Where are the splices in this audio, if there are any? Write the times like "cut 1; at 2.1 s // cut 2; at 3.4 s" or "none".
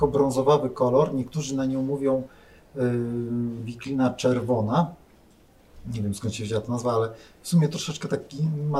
none

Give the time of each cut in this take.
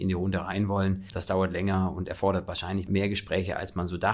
cut 1; at 1.1 s

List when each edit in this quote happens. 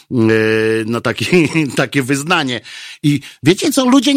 none

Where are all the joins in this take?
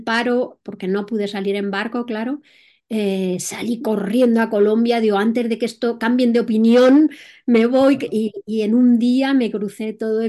none

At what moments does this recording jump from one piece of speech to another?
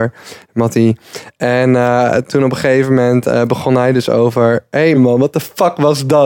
cut 1; at 4.9 s

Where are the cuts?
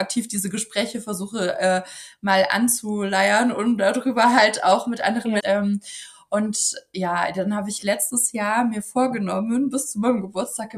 cut 1; at 5.4 s

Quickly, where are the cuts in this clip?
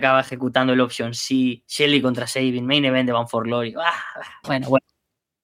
cut 1; at 4.4 s

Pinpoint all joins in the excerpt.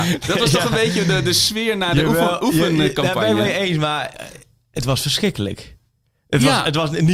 none

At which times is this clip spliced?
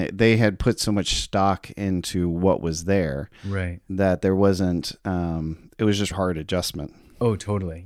cut 1; at 6.1 s

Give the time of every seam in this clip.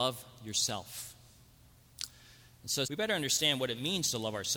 cut 1; at 2.8 s

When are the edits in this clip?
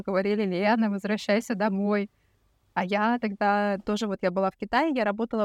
none

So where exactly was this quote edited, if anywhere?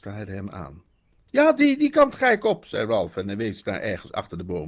cut 1; at 1.3 s

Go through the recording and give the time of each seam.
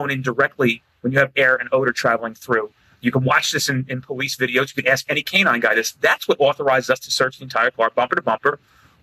cut 1; at 2.9 s

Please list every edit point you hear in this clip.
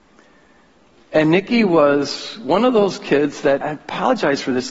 cut 1; at 3.6 s

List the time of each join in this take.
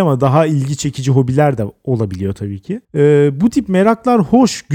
cut 1; at 2.8 s

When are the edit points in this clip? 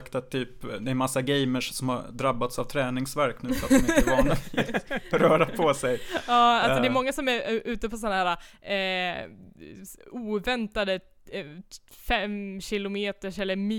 none

